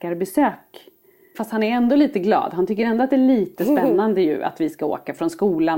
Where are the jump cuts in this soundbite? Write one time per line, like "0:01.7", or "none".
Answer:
0:01.3